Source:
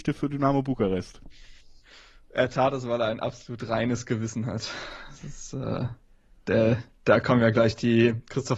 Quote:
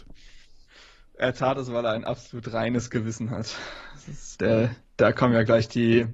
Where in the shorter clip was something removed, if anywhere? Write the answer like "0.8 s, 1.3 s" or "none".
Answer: 4.4 s